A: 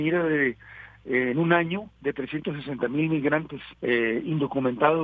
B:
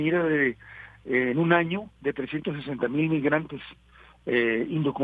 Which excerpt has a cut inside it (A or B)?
A